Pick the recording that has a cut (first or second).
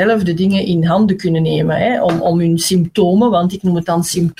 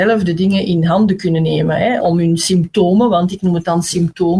second